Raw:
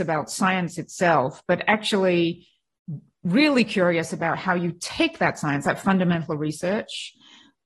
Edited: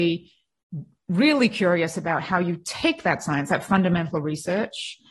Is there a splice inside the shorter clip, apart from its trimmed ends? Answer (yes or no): no